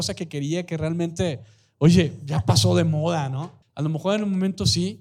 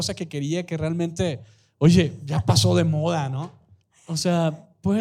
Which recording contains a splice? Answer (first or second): first